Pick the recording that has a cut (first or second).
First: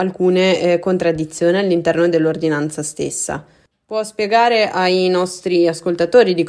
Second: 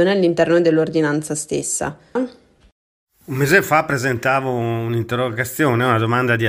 second